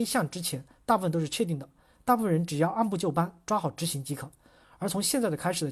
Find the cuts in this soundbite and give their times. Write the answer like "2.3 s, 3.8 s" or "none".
none